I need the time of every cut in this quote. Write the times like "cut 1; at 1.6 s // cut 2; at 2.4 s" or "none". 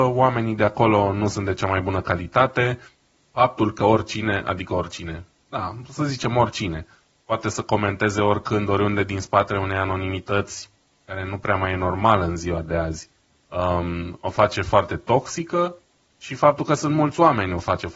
none